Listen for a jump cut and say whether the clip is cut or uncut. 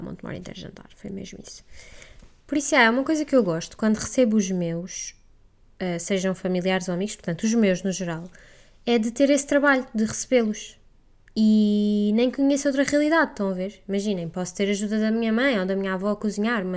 cut